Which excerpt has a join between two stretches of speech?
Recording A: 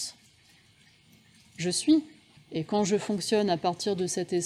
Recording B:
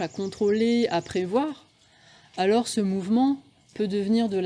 A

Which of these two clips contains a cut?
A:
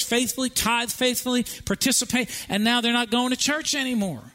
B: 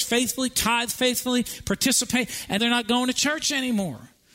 B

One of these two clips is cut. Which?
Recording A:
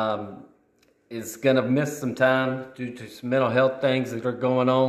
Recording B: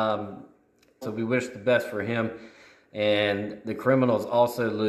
B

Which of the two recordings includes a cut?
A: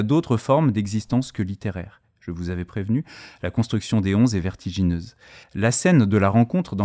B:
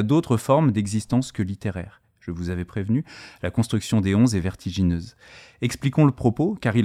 A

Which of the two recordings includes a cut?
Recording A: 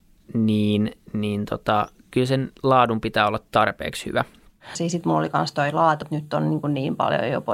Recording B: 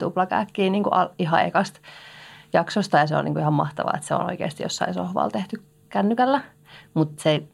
A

